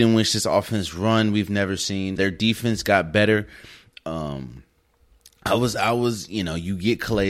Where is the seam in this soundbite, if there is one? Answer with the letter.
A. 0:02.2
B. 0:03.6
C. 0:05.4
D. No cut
A